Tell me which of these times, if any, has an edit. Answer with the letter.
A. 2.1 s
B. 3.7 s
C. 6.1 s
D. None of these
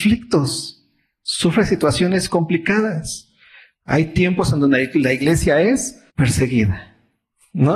C